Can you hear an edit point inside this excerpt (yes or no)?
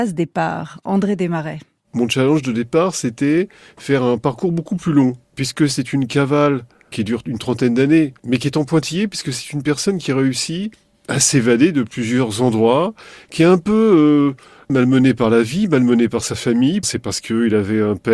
yes